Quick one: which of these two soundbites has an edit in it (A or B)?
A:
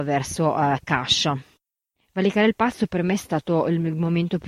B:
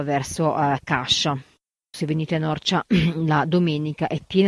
B